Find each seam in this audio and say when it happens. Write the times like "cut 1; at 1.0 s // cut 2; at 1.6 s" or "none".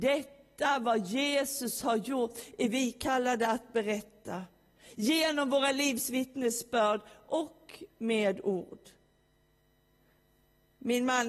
none